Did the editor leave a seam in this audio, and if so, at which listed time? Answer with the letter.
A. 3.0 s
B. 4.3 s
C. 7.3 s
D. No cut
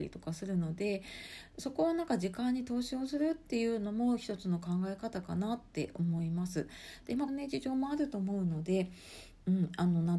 C